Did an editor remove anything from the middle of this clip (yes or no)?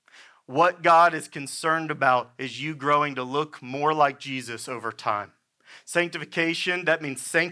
no